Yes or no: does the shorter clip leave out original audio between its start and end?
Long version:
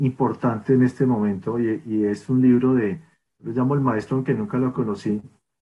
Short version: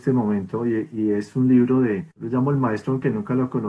yes